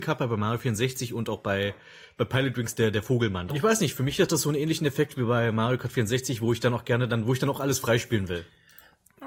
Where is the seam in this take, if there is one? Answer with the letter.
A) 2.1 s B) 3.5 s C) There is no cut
B